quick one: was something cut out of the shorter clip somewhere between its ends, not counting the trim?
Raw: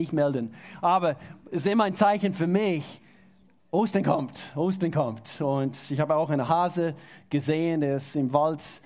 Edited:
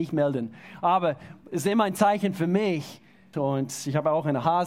yes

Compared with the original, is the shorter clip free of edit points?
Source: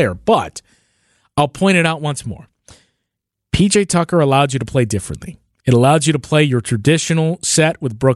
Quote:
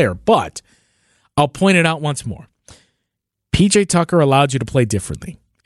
yes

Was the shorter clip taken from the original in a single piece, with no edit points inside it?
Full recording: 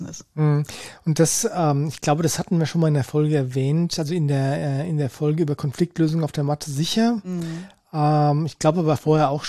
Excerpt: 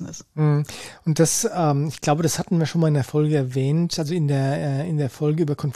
yes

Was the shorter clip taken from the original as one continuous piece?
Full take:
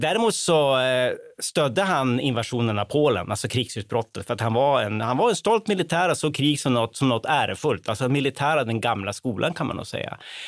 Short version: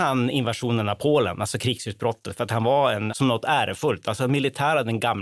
no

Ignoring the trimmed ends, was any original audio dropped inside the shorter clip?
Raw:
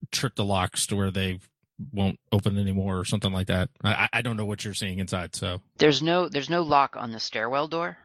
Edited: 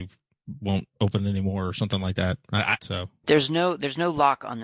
yes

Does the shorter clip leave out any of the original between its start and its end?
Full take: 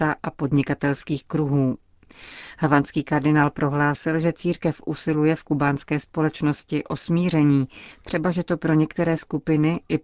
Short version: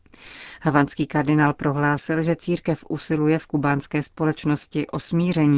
no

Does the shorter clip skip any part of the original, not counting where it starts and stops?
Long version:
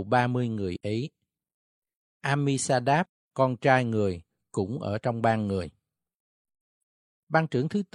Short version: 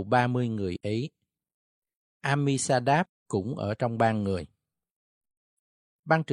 yes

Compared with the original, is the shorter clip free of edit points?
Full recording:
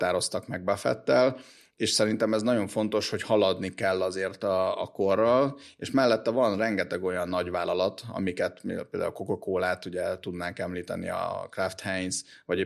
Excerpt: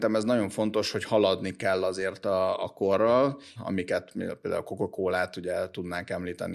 no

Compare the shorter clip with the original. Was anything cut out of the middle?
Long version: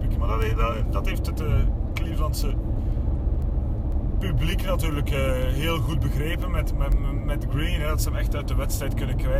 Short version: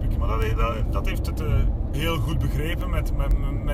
yes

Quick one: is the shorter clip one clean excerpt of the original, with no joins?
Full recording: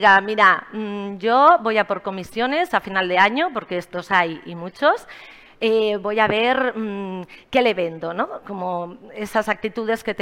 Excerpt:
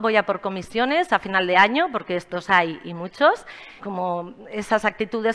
no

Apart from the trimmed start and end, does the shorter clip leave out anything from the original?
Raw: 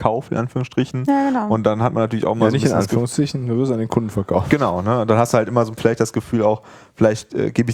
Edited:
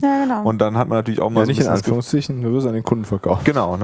no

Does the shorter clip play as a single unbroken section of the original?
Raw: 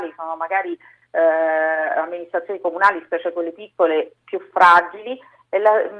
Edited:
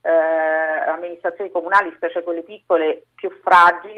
yes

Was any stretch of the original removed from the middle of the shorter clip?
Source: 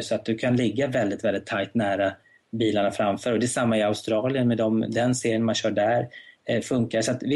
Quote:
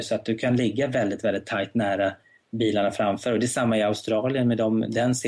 no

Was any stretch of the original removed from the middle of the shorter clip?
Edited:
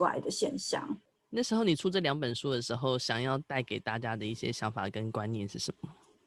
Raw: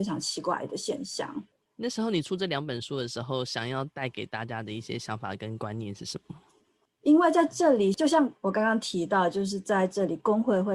no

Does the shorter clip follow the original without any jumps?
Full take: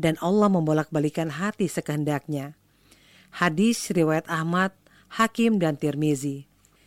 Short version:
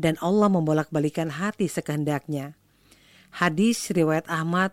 yes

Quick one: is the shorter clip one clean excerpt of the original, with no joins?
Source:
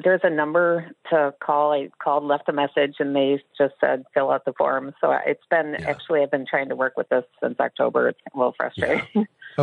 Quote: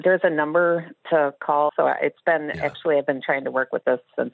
no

